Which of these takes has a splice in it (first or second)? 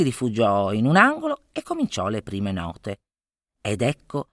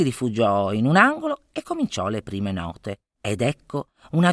second